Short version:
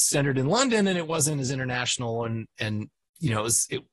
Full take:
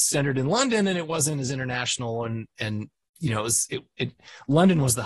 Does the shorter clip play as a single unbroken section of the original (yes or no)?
yes